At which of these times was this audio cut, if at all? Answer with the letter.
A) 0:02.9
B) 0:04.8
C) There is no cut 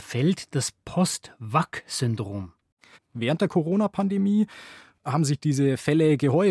A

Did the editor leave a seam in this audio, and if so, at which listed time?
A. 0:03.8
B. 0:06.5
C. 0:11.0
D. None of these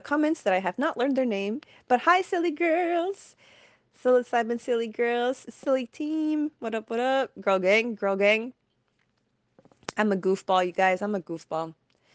D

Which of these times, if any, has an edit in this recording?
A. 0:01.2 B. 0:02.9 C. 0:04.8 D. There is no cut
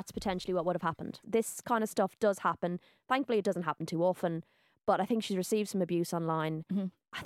A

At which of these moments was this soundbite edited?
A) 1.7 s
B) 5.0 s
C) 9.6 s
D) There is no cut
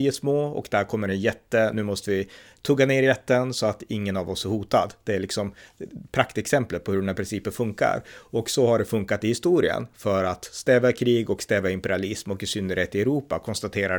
D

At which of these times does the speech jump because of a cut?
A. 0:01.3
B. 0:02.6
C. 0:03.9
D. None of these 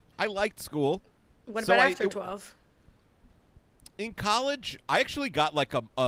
D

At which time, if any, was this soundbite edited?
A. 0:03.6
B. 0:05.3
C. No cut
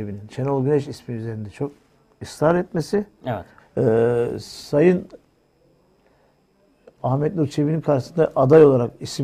A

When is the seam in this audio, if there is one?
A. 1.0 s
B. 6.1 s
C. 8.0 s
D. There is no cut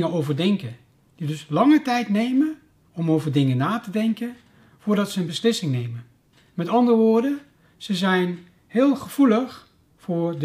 D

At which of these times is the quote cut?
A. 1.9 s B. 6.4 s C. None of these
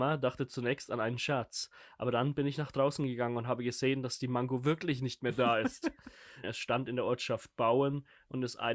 B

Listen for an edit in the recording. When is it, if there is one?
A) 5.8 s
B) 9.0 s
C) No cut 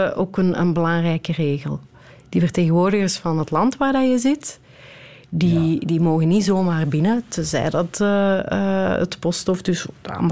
C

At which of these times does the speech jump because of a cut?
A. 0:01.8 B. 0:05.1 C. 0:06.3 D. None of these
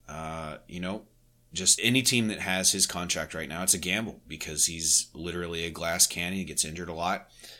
A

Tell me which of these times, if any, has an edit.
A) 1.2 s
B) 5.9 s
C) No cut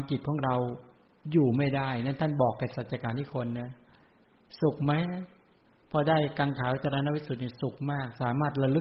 C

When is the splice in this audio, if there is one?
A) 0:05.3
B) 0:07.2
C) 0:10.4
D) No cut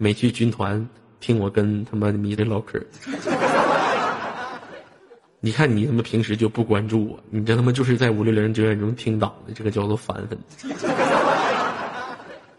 D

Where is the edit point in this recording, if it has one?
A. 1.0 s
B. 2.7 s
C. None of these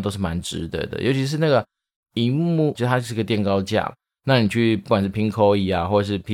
B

